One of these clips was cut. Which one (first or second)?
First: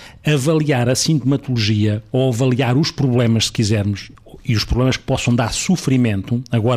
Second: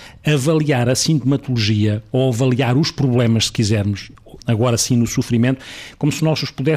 second